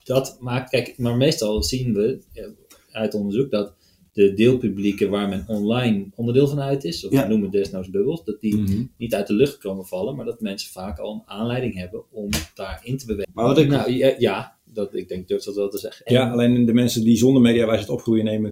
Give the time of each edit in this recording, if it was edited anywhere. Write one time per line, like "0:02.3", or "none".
0:13.2
0:16.1